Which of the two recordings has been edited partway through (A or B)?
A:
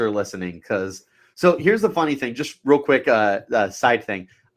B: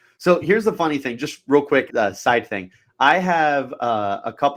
B